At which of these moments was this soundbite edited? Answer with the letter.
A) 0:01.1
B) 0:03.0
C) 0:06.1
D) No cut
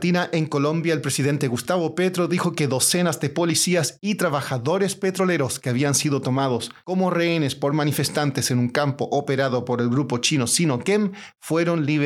D